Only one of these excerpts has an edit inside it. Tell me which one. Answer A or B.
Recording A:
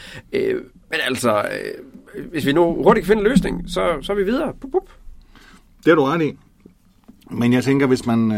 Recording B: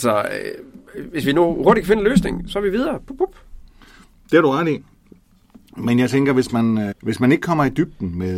B